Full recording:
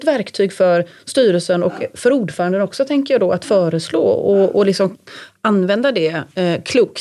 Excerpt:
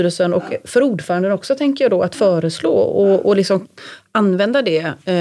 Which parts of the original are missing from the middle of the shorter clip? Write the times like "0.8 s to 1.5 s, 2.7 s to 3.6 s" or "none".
none